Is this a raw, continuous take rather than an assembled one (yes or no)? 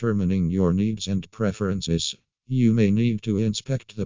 yes